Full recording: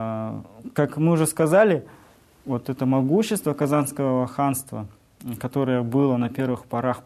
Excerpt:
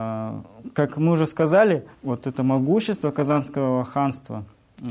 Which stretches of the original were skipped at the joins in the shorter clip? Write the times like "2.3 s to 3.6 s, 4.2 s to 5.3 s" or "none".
1.9 s to 2.3 s